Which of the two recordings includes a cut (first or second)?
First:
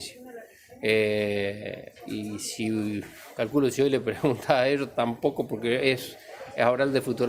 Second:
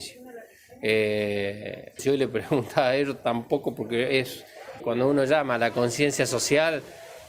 second